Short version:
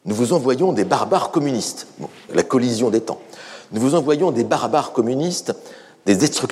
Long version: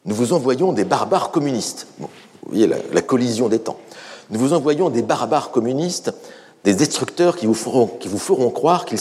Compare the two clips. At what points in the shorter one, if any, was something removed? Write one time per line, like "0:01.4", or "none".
0:02.3